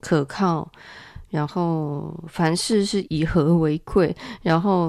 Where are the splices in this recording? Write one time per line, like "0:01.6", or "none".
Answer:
0:03.1